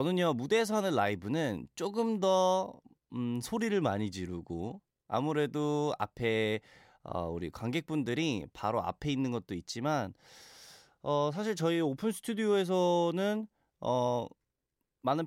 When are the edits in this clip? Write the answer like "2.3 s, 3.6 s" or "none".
none